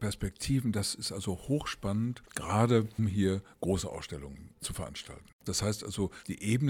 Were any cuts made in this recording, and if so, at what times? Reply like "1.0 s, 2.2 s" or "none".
3.0 s, 5.5 s